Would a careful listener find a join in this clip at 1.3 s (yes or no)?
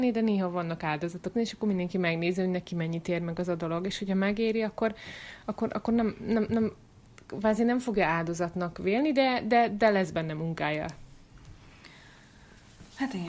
yes